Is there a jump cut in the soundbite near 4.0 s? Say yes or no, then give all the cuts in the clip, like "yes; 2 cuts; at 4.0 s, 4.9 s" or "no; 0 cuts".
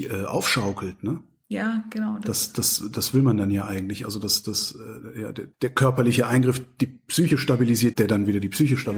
no; 2 cuts; at 5.5 s, 7.9 s